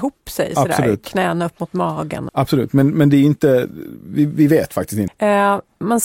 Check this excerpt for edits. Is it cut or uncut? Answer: cut